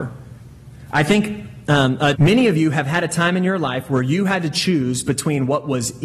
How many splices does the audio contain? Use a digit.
1